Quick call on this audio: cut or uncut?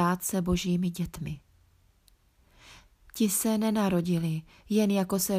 uncut